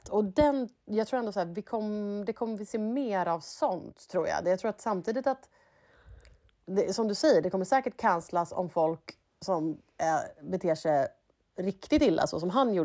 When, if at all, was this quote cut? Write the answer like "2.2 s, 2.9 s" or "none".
4.4 s